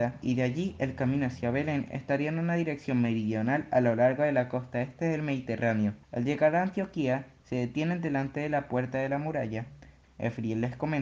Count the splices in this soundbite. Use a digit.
2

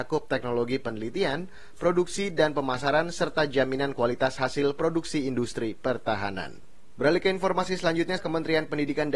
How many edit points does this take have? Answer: 1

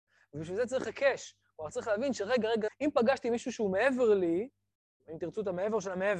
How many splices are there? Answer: 2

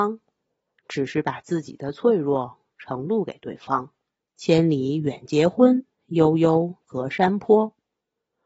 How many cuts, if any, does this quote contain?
2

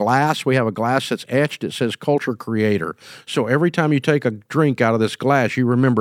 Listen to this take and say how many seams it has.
0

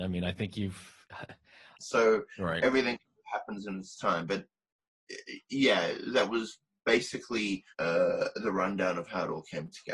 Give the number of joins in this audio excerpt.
2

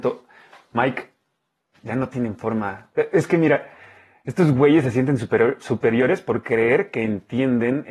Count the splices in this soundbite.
0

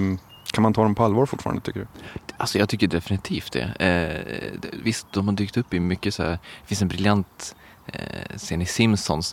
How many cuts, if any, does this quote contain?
0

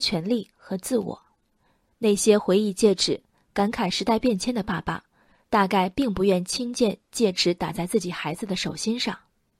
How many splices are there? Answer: 0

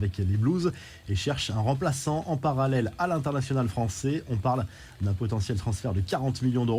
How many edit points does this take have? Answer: 0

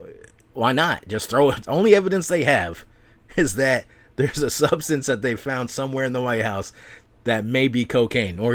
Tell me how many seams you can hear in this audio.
1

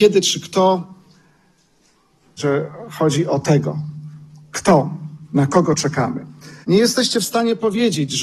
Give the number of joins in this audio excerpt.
2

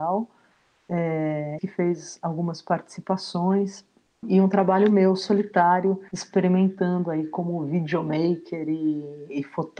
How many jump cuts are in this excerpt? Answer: 3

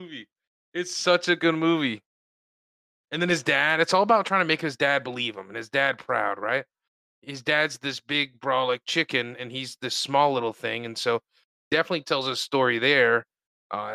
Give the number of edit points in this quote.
0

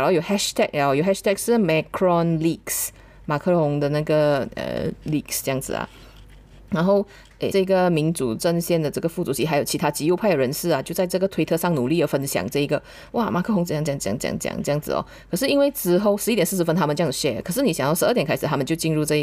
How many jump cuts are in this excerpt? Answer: 1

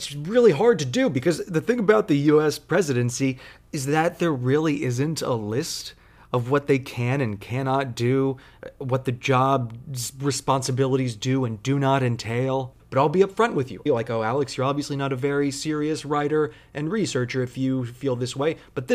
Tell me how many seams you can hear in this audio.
2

